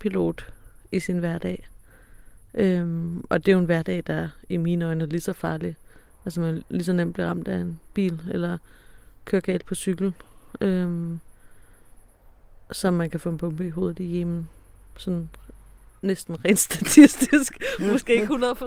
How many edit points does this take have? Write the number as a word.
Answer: zero